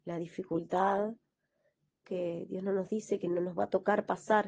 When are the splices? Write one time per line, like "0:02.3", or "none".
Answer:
0:02.0